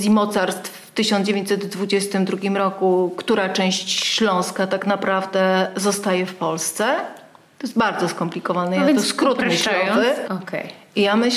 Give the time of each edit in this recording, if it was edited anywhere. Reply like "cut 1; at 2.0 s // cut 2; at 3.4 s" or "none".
cut 1; at 10.3 s